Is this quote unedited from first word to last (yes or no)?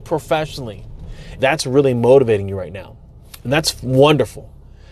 no